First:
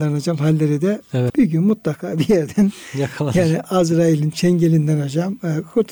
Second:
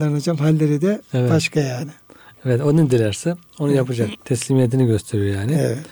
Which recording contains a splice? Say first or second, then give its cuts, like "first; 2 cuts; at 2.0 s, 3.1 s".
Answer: first; 1 cut; at 1.3 s